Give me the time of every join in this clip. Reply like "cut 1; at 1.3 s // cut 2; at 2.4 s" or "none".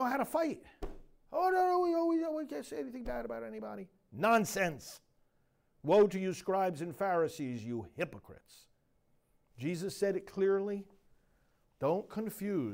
cut 1; at 11.6 s